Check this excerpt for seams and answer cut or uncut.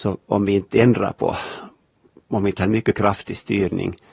uncut